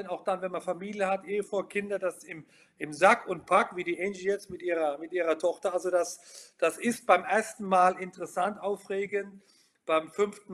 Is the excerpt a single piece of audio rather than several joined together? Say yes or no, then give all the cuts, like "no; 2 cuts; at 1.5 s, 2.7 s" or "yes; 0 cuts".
yes; 0 cuts